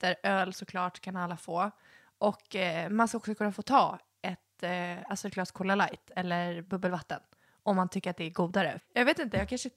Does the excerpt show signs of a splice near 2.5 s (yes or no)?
no